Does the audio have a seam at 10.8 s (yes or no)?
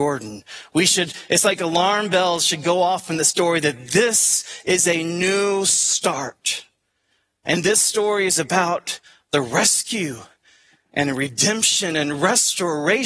no